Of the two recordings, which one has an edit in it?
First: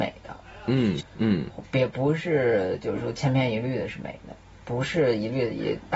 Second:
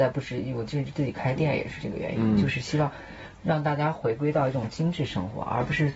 first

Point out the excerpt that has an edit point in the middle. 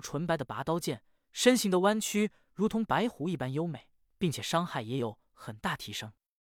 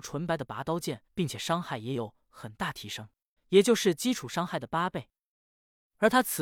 second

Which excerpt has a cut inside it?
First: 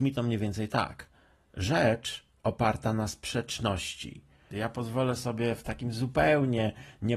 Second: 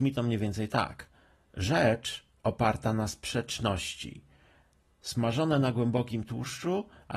first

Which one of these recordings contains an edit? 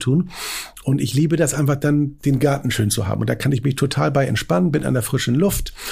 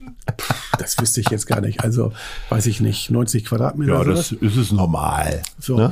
first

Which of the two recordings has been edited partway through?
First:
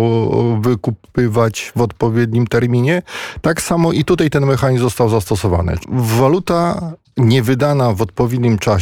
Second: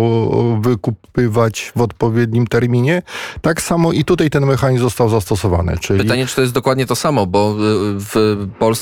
first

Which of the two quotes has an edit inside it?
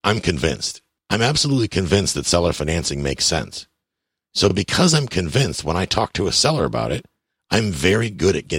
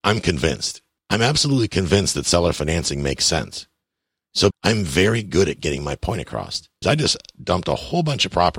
second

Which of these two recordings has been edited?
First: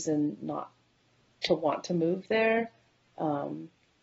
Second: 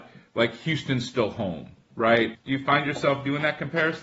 second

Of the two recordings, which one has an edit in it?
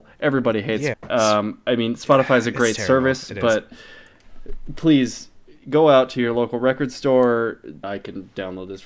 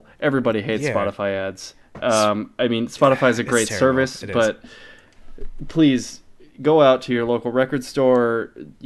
first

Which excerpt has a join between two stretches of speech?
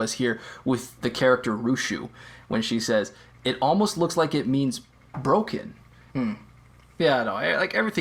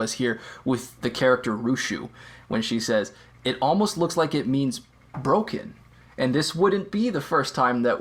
first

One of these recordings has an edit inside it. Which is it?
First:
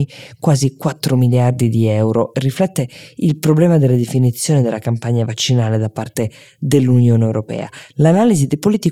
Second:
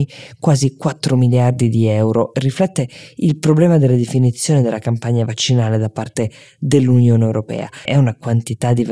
second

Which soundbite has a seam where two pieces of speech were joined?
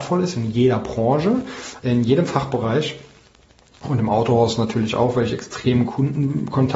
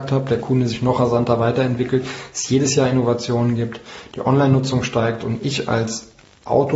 first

